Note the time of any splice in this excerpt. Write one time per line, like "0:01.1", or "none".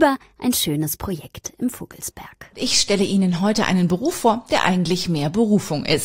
none